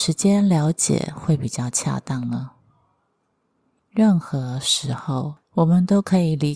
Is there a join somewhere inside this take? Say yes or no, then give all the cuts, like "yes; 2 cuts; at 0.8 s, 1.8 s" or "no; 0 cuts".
yes; 1 cut; at 3.8 s